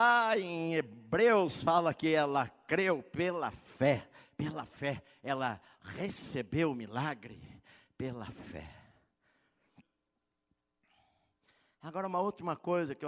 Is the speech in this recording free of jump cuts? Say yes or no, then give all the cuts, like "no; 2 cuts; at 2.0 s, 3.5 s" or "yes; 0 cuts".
yes; 0 cuts